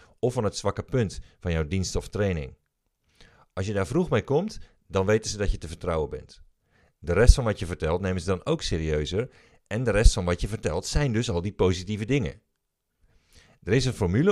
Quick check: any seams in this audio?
no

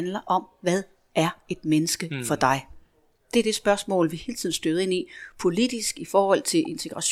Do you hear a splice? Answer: no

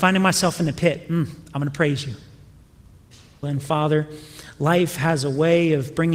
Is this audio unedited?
no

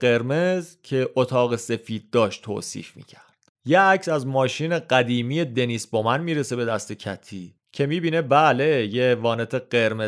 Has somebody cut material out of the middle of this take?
yes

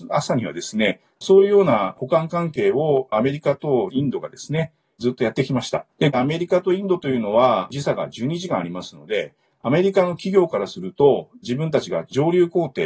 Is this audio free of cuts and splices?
no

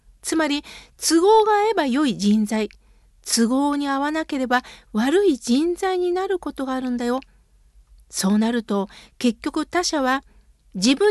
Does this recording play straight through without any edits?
yes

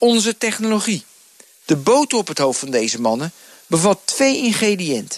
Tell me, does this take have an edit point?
yes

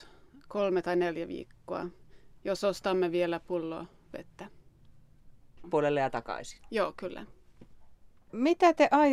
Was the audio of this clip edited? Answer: yes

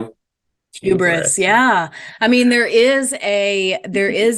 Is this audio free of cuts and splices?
yes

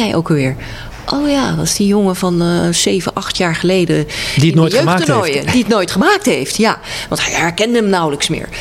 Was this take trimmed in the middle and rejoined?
no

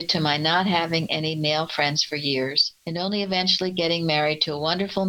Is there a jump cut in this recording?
yes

